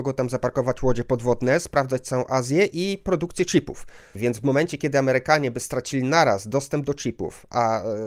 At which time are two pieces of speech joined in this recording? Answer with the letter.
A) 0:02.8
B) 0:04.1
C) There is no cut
B